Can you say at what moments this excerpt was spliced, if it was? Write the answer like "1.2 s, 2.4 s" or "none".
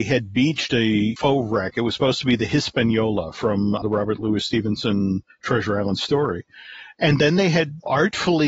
none